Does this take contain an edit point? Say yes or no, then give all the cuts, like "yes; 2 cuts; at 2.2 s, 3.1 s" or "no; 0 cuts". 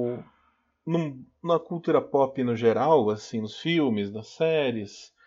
no; 0 cuts